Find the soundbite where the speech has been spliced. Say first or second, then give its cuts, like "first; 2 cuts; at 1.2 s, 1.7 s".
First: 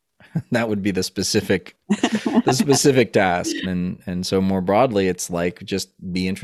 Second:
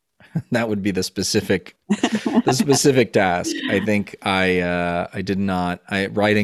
first; 1 cut; at 3.6 s